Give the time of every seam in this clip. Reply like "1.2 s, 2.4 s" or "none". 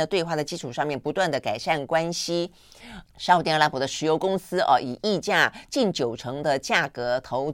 3.0 s

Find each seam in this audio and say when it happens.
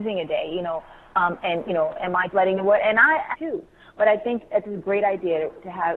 2.3 s, 3.3 s

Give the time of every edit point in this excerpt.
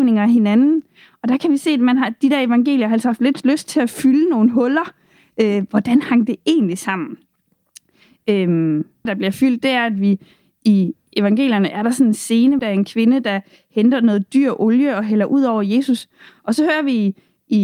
9.1 s, 12.6 s

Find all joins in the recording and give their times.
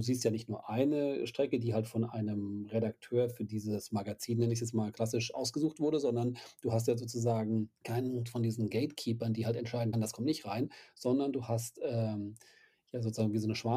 7.8 s, 9.9 s

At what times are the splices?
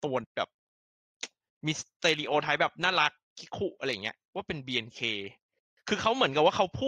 none

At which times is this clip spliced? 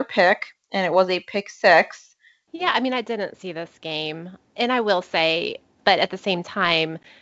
2.5 s, 5.8 s

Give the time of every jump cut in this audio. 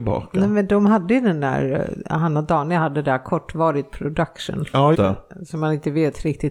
4.9 s

